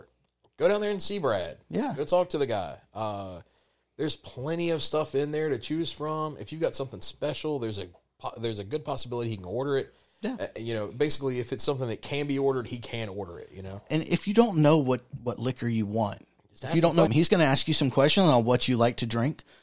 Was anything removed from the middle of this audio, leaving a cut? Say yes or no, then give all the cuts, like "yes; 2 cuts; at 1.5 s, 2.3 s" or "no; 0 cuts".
yes; 1 cut; at 17.1 s